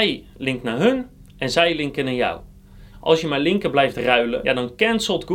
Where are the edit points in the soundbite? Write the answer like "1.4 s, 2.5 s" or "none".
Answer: 2.9 s, 4.4 s